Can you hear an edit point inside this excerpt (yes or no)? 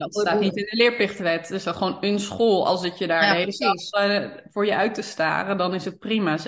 no